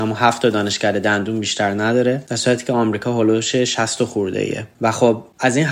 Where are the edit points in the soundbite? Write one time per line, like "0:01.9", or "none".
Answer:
none